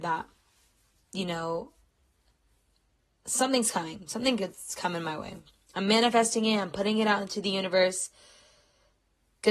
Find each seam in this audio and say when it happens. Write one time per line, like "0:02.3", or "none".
none